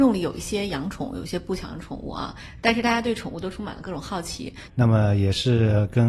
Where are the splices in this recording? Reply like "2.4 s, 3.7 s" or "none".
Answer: 4.7 s